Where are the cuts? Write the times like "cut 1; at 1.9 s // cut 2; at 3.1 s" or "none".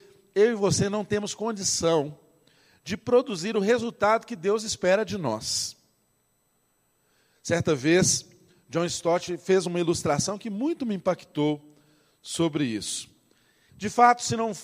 cut 1; at 13.7 s